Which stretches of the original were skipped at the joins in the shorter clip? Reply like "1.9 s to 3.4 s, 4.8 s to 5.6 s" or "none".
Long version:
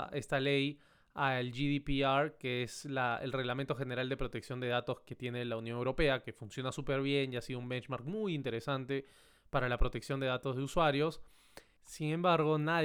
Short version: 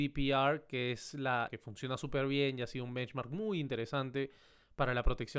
3.2 s to 6.2 s